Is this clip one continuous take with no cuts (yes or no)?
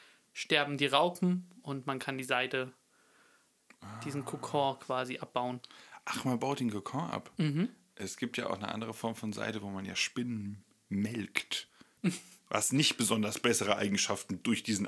no